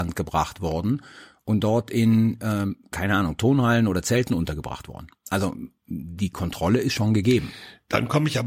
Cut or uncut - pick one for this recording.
uncut